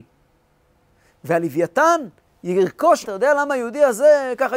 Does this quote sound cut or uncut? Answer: cut